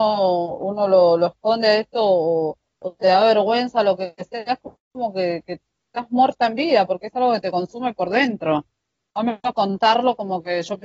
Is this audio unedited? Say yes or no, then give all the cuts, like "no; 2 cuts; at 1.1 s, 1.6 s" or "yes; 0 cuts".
yes; 0 cuts